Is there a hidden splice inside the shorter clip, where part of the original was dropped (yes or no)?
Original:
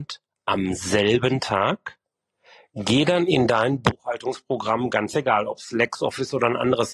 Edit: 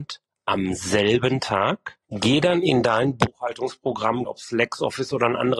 yes